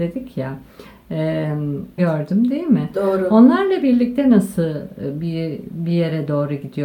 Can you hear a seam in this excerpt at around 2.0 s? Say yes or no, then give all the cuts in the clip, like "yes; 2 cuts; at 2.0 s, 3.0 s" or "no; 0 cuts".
yes; 1 cut; at 2.0 s